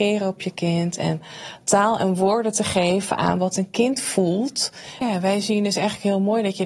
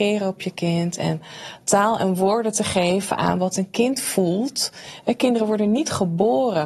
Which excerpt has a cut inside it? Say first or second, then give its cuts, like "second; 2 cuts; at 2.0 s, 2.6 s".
first; 1 cut; at 5.0 s